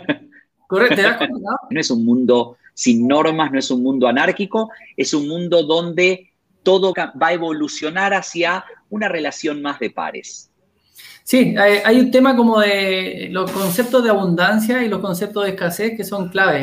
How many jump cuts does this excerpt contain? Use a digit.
2